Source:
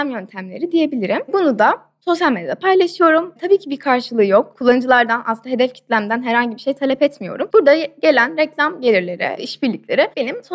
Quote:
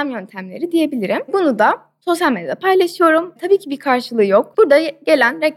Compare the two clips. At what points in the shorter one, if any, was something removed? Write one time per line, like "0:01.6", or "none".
0:04.5

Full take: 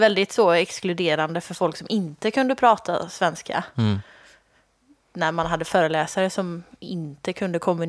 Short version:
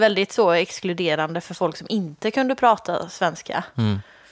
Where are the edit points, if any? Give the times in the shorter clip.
none

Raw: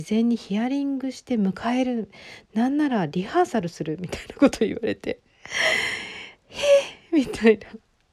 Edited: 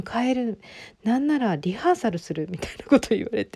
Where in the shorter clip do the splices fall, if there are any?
none

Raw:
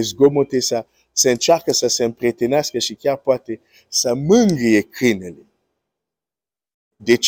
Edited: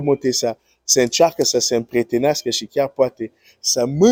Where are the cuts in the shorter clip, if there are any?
none

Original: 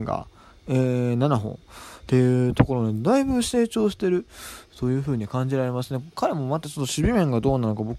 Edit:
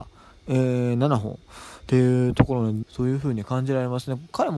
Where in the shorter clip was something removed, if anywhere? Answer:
0:02.8

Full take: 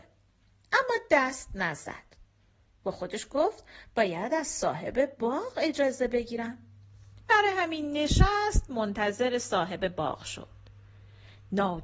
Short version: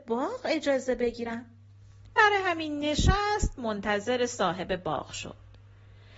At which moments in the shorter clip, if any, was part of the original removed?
none

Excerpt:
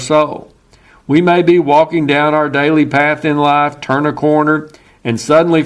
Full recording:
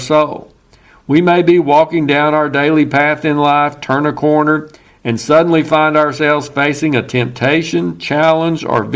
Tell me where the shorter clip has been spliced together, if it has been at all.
none

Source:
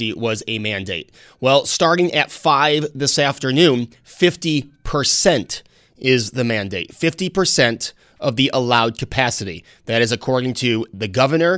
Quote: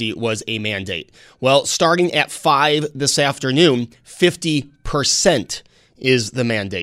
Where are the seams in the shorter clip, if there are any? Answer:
none

